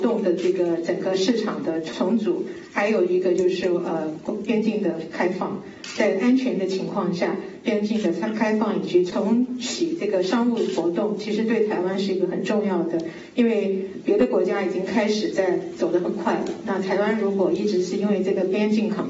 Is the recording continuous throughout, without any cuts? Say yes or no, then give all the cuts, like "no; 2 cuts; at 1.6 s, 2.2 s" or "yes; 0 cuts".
yes; 0 cuts